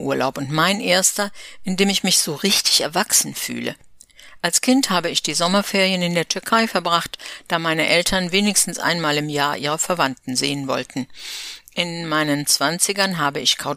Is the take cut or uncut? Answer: uncut